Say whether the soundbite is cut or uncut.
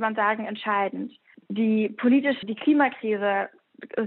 cut